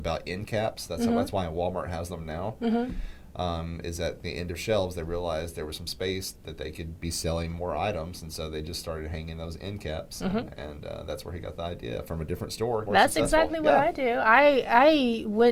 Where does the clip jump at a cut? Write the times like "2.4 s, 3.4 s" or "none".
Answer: 12.9 s